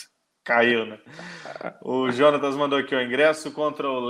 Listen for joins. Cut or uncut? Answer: uncut